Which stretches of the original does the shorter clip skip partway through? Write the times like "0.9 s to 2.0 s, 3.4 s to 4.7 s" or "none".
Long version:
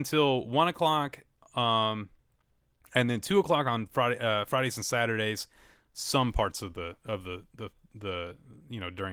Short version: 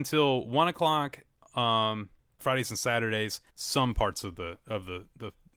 2.4 s to 4.5 s, 5.6 s to 5.9 s